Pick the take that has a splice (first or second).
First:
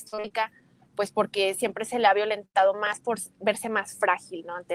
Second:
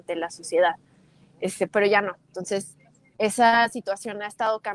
second